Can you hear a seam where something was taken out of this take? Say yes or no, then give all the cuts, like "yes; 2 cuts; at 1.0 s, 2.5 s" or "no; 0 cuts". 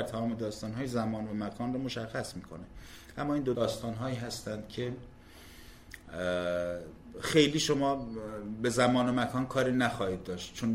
yes; 1 cut; at 3.5 s